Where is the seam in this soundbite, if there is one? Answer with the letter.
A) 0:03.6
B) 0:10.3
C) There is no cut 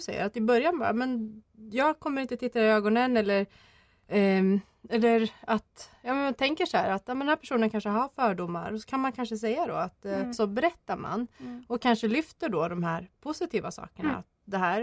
B